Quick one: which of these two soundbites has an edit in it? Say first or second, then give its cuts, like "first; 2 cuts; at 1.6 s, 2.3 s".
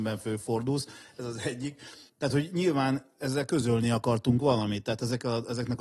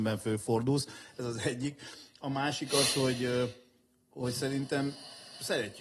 first; 1 cut; at 2.1 s